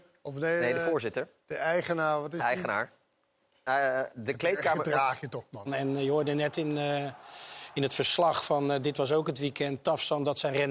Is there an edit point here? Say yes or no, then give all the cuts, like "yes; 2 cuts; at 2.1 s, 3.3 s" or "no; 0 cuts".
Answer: yes; 1 cut; at 5.7 s